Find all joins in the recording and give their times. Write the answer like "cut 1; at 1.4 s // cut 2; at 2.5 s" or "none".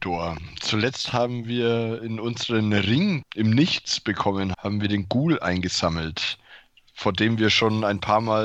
cut 1; at 3.2 s // cut 2; at 4.5 s

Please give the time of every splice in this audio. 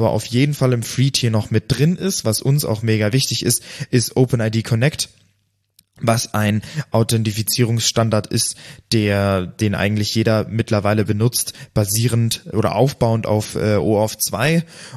none

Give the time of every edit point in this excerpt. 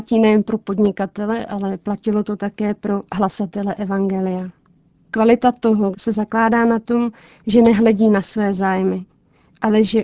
cut 1; at 5.9 s

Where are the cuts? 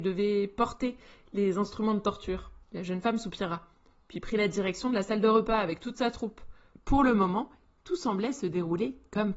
cut 1; at 2.6 s // cut 2; at 6.7 s

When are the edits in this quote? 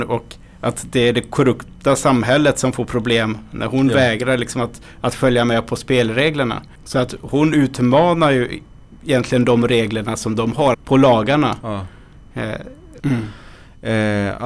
cut 1; at 6.8 s // cut 2; at 10.7 s // cut 3; at 13.0 s

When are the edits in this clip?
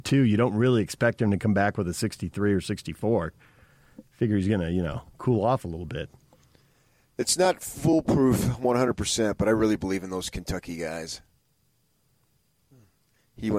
none

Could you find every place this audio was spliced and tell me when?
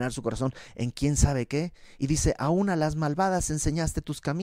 none

